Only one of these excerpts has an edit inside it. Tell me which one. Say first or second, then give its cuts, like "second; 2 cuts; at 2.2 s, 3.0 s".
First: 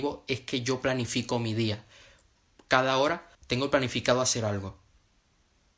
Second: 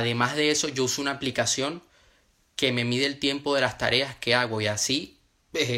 first; 1 cut; at 3.3 s